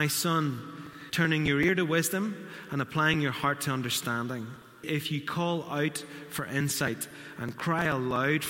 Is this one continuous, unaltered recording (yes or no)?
no